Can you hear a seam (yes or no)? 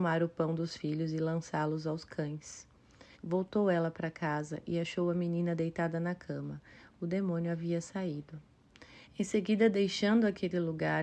yes